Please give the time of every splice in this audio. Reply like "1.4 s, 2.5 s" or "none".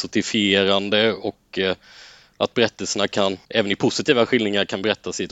3.4 s